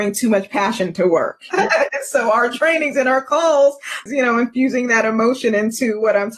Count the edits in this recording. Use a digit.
2